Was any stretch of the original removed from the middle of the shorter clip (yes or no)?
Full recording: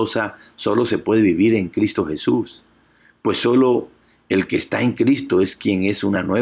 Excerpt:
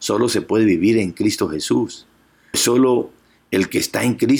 yes